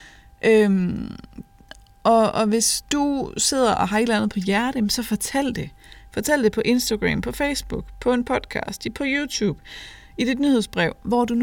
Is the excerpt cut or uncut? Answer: uncut